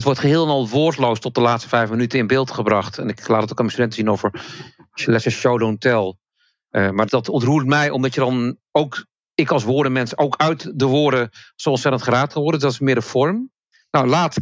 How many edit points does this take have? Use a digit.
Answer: 1